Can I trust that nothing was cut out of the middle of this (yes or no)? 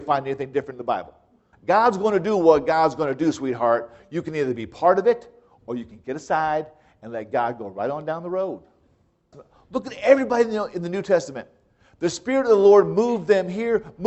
no